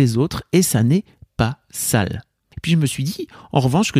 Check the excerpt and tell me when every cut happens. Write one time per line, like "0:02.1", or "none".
0:02.5